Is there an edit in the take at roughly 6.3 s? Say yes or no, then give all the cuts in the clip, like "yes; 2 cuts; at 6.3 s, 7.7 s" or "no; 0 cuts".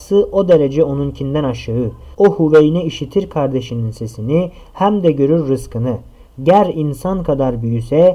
no; 0 cuts